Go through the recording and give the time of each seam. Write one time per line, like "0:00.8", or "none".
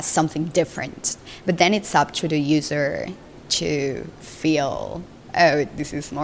0:01.4